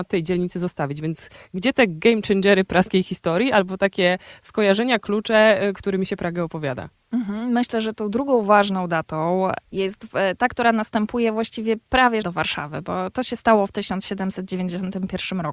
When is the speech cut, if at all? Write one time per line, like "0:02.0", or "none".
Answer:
0:12.2